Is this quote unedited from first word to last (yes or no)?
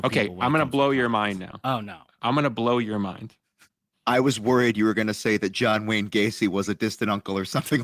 no